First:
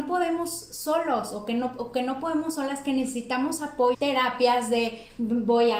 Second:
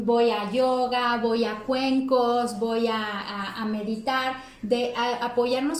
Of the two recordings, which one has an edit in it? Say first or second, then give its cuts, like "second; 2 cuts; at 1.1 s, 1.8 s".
first; 1 cut; at 3.9 s